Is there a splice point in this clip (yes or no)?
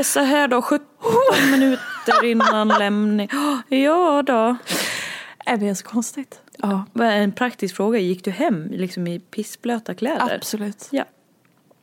yes